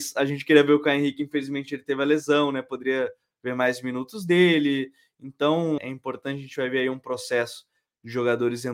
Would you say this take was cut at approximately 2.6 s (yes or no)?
no